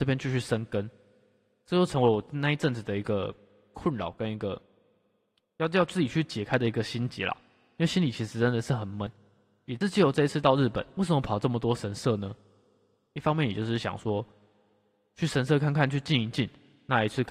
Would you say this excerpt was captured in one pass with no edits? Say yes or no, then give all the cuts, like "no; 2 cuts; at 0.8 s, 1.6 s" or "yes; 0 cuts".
yes; 0 cuts